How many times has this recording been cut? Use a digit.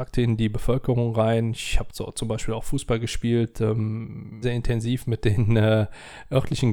1